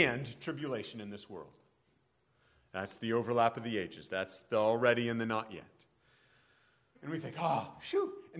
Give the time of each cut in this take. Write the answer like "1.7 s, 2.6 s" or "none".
6.9 s